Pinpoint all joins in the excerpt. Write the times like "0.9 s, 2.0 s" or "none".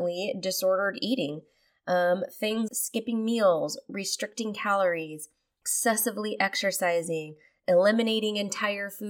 2.7 s

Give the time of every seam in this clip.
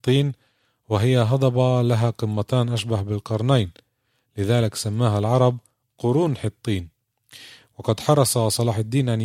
none

